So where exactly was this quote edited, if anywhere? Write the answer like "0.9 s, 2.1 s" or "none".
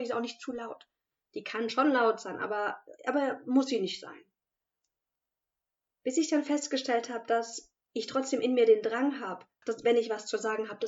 9.6 s